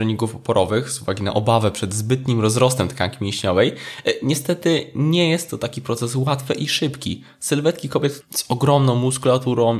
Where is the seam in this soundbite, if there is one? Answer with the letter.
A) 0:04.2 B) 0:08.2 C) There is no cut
B